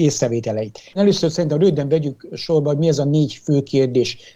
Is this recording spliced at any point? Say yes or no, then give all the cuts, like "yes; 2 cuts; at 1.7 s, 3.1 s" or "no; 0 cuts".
yes; 1 cut; at 0.9 s